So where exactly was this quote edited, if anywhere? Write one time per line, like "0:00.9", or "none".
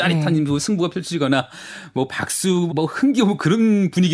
0:02.7